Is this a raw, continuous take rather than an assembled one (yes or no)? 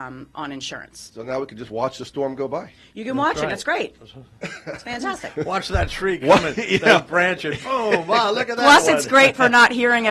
yes